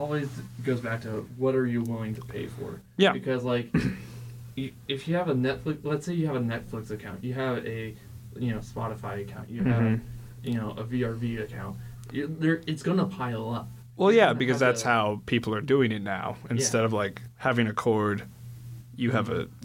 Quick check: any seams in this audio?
no; 0 cuts

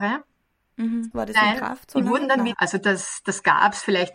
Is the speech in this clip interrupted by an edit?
yes; 2 cuts; at 1.1 s, 2.5 s

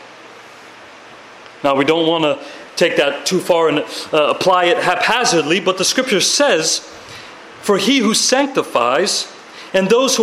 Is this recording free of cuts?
yes; 0 cuts

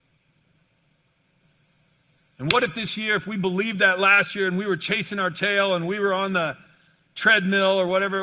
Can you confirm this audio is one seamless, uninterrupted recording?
yes; 0 cuts

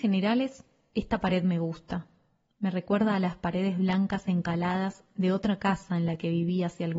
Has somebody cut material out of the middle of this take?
no; 0 cuts

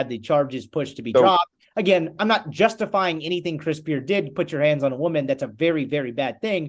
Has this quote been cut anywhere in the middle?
no; 0 cuts

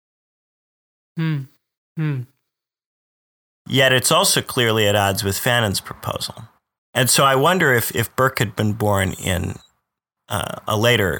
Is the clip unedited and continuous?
no; 2 cuts; at 1.8 s, 6.8 s

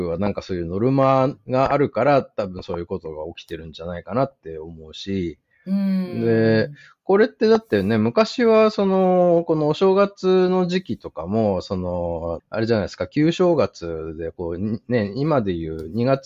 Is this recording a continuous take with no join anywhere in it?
no; 1 cut; at 12.4 s

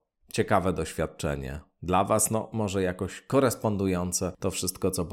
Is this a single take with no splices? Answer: yes; 0 cuts

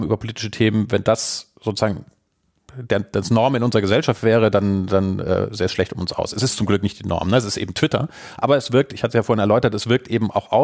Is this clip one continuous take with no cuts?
yes; 0 cuts

